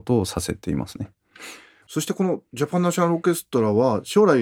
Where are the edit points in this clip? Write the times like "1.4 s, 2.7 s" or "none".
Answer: none